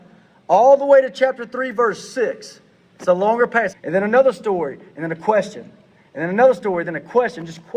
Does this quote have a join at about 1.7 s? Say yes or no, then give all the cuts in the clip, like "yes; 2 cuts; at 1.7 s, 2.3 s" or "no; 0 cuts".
no; 1 cut; at 3.7 s